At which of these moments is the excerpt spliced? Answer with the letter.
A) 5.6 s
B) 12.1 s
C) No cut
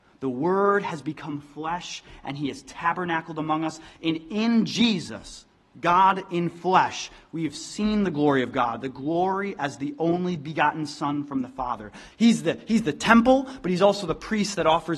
B